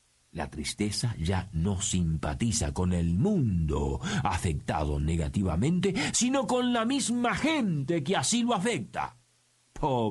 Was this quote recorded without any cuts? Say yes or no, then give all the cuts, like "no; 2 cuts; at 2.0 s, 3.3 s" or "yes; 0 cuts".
yes; 0 cuts